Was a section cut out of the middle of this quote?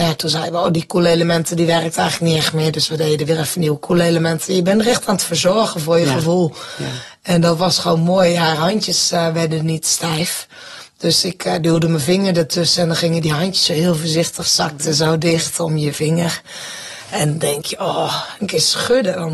yes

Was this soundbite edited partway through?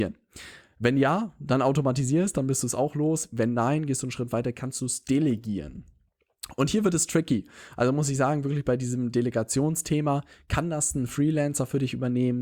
no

